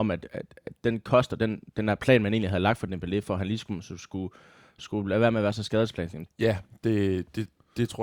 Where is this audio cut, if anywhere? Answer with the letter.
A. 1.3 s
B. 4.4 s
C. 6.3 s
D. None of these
C